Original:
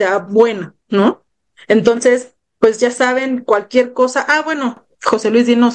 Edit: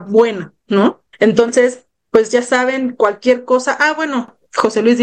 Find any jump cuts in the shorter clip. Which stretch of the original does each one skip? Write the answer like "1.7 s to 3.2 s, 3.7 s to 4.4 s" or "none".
1.3 s to 1.6 s